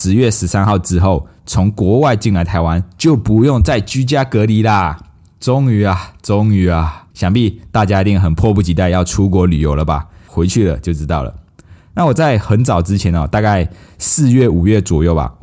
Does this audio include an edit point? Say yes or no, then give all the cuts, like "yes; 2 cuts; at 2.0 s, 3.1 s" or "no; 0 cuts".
yes; 2 cuts; at 7.1 s, 10.3 s